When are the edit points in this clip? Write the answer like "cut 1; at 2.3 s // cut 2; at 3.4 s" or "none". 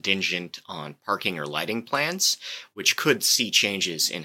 none